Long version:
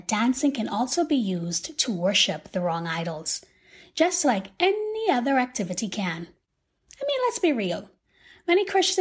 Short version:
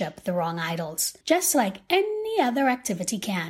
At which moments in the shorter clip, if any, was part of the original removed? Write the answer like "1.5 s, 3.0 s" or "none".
1.2 s